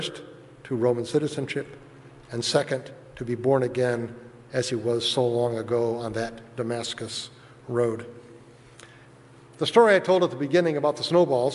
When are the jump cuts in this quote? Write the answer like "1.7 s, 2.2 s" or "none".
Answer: none